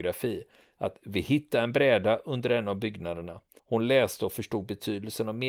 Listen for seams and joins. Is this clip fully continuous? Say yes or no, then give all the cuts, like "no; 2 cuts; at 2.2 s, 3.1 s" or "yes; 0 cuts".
no; 1 cut; at 3.6 s